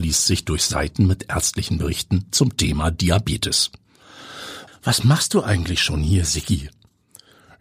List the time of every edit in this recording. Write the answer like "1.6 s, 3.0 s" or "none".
4.7 s